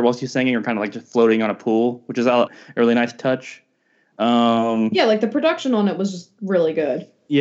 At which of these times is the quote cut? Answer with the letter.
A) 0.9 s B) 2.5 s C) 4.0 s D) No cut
B